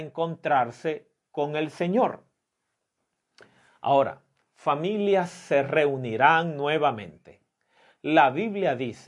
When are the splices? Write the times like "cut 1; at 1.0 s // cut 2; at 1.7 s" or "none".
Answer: none